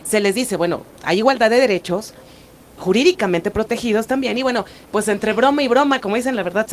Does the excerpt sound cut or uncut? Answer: cut